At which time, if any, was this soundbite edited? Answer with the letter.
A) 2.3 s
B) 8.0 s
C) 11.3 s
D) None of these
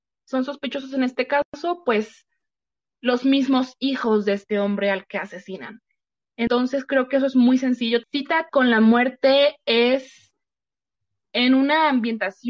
B